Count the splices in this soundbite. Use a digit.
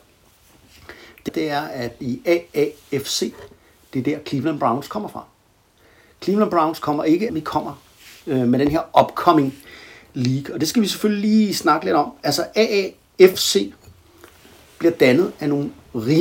2